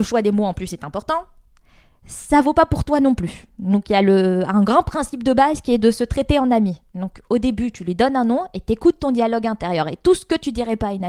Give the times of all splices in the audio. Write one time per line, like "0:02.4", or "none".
none